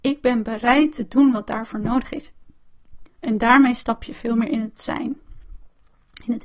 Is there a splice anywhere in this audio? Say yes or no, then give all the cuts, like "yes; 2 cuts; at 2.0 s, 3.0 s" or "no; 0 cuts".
yes; 1 cut; at 3.1 s